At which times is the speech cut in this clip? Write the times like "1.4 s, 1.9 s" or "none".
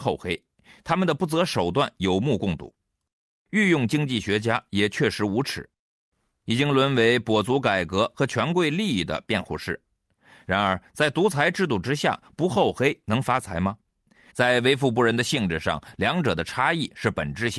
14.3 s